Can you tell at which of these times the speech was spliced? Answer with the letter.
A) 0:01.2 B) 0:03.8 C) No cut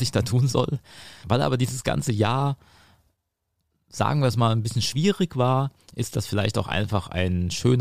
A